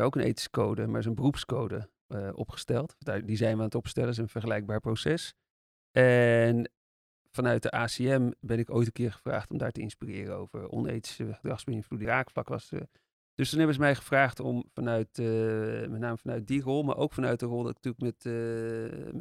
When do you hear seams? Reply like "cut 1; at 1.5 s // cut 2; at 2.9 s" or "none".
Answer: cut 1; at 12.0 s

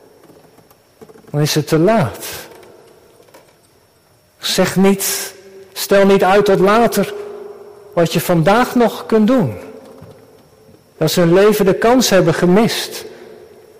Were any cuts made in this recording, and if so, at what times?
cut 1; at 11.0 s

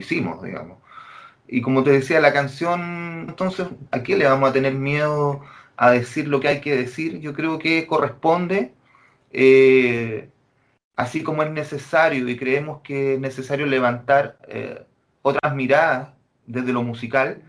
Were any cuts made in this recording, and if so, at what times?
cut 1; at 3.3 s

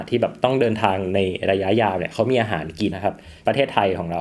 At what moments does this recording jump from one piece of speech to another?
cut 1; at 2.9 s

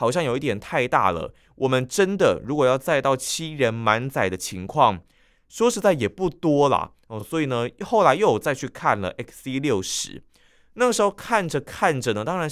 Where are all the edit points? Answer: none

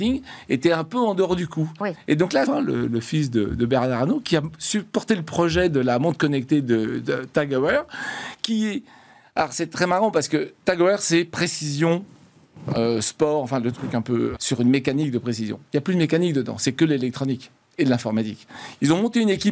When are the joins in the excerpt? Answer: cut 1; at 2.4 s // cut 2; at 14.3 s

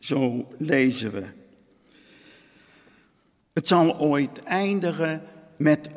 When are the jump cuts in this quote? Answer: cut 1; at 3.4 s

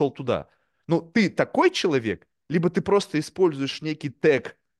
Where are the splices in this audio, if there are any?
none

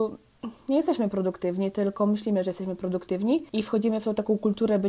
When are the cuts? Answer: cut 1; at 3.5 s

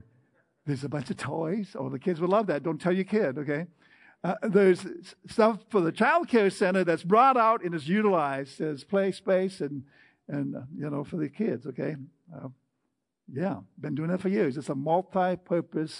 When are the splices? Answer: none

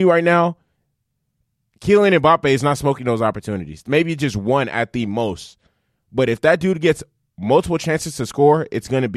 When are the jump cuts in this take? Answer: none

